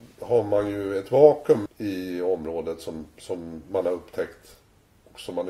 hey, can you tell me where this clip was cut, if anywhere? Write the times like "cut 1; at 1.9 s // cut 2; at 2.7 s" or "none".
cut 1; at 1.7 s